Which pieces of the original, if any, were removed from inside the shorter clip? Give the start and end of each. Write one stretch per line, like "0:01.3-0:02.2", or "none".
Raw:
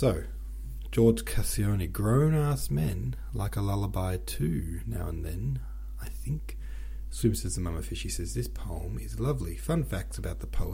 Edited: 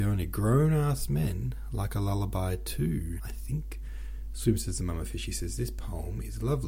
0:04.8-0:06.0